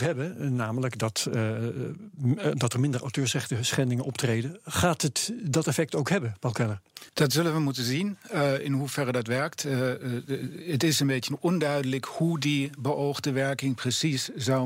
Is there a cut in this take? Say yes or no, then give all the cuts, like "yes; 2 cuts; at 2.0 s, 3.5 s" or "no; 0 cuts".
yes; 1 cut; at 7.1 s